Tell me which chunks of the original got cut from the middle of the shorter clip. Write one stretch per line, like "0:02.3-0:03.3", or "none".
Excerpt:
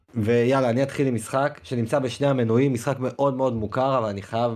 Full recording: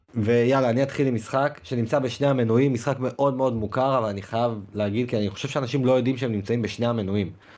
none